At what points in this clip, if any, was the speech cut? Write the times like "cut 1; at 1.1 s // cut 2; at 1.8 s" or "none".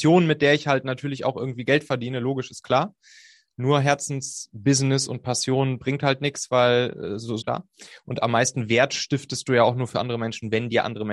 cut 1; at 7.4 s

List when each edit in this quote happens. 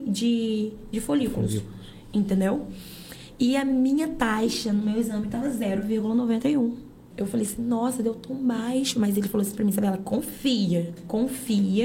cut 1; at 7.1 s

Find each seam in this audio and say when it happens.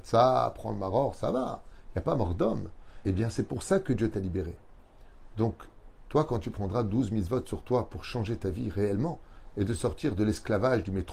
cut 1; at 3.0 s

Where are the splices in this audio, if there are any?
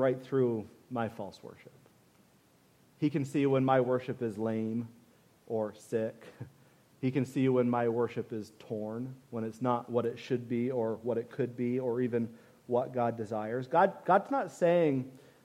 cut 1; at 9.2 s

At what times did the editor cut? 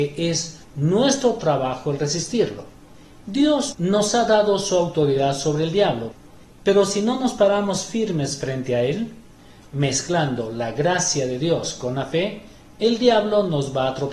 cut 1; at 3.7 s

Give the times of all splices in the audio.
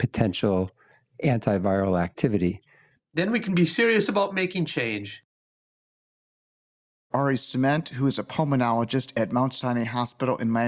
cut 1; at 3.0 s // cut 2; at 7.1 s

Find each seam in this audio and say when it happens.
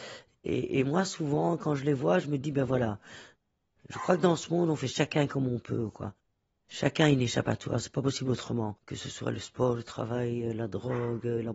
none

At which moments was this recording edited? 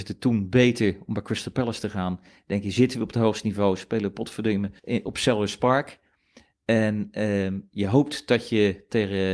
cut 1; at 4.8 s

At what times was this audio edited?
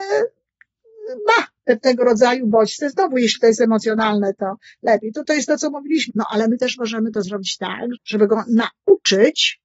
cut 1; at 6.1 s // cut 2; at 7.9 s

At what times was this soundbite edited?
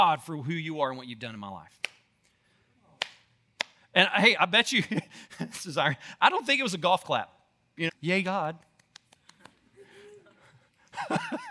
cut 1; at 4.4 s // cut 2; at 7.9 s

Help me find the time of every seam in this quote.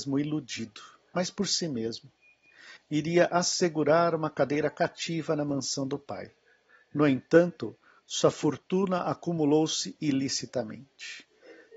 cut 1; at 2.8 s

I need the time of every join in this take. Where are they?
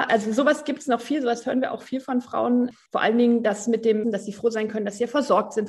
cut 1; at 4.0 s

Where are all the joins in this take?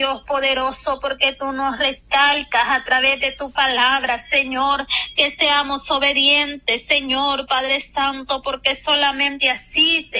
none

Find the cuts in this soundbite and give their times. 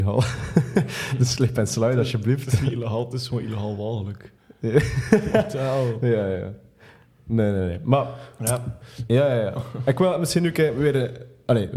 cut 1; at 9.1 s

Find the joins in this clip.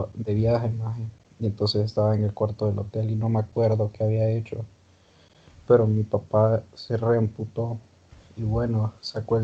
none

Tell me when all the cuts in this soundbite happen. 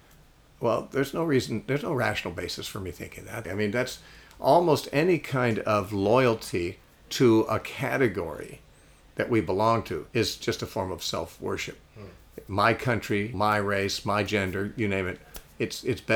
cut 1; at 3.4 s // cut 2; at 10.1 s // cut 3; at 13.3 s

